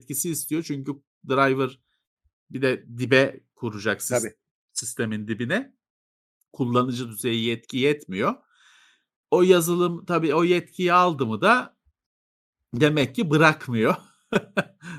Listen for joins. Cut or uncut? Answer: uncut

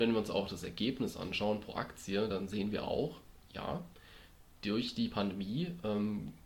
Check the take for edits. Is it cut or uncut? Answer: uncut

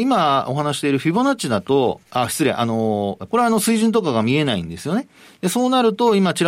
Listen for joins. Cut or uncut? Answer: cut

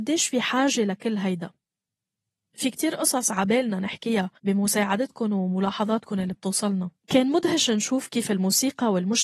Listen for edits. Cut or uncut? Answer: cut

